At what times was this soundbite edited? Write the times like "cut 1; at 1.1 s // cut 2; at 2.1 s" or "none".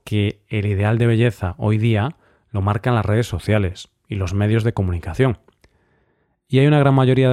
none